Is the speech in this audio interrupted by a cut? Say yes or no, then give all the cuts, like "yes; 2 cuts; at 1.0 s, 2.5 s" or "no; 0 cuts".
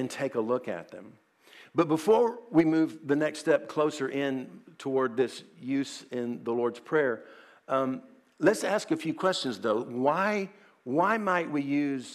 no; 0 cuts